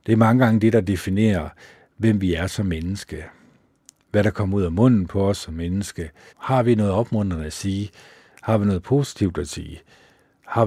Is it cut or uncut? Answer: cut